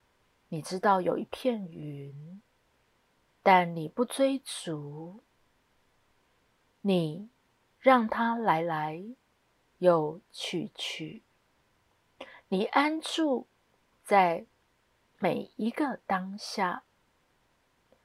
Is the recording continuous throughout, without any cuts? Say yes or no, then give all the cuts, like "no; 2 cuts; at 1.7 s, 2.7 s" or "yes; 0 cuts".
yes; 0 cuts